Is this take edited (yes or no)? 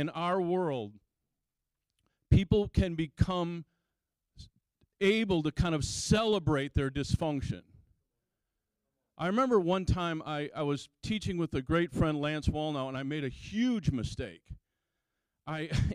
no